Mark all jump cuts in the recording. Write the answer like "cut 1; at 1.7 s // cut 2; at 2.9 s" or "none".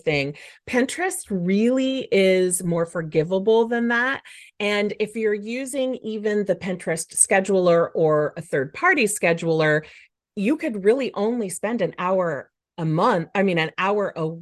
none